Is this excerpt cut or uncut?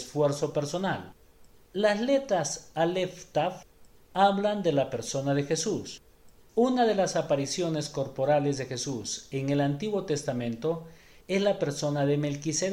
uncut